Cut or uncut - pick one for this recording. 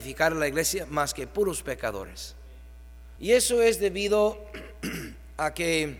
cut